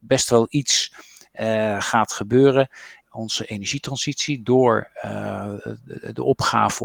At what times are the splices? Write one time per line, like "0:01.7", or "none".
0:03.0